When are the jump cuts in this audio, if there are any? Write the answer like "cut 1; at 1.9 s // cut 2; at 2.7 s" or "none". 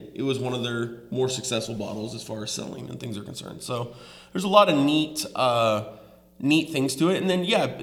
none